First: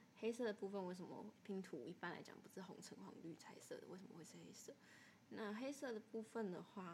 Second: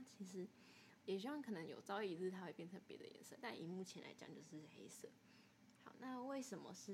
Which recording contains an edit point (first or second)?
second